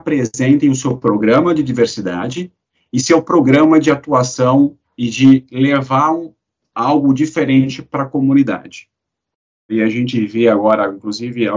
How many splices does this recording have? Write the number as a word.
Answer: one